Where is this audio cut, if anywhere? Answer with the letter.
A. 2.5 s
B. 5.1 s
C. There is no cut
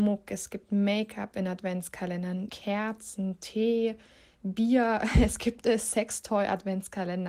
A